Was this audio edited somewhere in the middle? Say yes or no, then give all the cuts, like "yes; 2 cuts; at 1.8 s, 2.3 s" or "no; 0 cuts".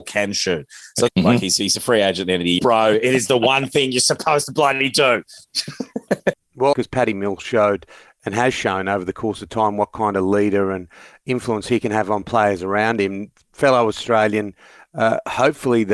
yes; 3 cuts; at 1.1 s, 2.6 s, 6.7 s